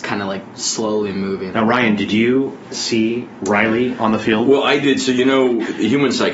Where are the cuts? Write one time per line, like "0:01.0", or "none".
0:01.5